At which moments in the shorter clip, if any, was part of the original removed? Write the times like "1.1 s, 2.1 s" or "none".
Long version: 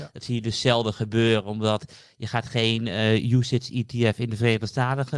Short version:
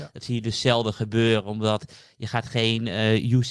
none